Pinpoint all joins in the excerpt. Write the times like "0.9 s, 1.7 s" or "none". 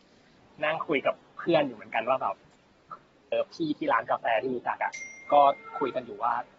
3.3 s